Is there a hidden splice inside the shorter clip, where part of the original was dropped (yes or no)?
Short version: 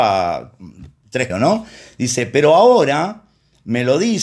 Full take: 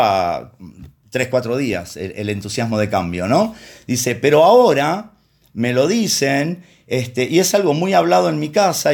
yes